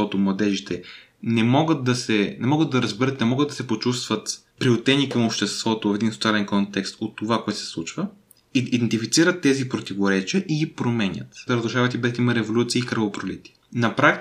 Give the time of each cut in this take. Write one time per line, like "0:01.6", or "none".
0:04.5
0:11.5